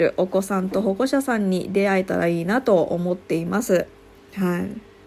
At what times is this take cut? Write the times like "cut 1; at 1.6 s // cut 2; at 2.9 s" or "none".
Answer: cut 1; at 4.1 s